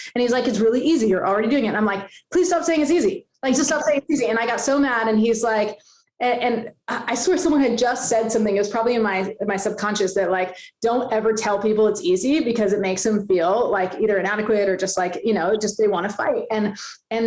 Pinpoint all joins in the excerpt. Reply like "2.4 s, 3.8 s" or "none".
none